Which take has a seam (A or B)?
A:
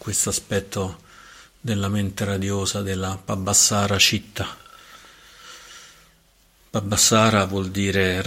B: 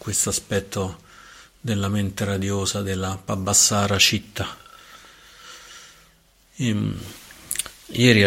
B